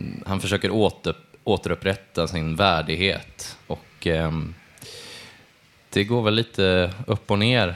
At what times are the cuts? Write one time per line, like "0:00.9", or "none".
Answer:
0:03.6